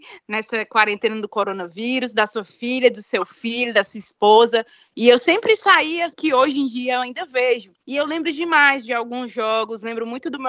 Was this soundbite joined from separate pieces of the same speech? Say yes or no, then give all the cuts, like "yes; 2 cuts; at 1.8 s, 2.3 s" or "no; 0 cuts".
yes; 3 cuts; at 4.9 s, 6.1 s, 7.8 s